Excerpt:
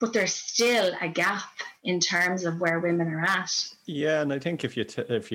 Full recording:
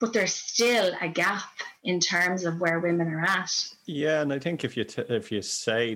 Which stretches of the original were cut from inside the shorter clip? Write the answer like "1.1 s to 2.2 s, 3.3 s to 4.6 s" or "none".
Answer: none